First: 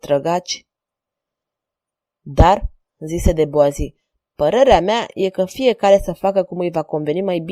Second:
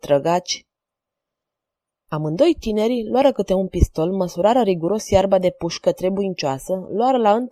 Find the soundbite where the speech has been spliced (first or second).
second